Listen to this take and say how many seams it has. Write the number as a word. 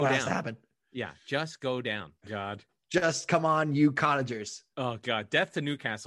two